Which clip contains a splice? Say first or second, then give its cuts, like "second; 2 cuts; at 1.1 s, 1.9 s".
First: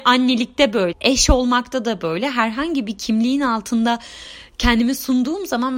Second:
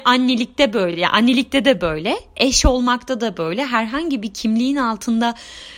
first; 1 cut; at 0.9 s